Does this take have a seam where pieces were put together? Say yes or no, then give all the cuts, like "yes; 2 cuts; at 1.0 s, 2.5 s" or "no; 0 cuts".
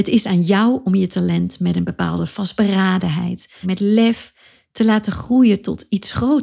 yes; 1 cut; at 3.6 s